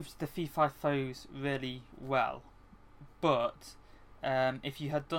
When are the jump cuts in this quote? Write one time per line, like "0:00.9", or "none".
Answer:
0:01.9